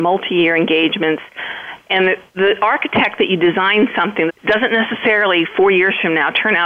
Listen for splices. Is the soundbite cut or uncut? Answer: cut